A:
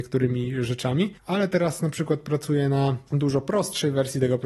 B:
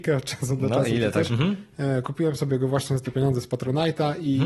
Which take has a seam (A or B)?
B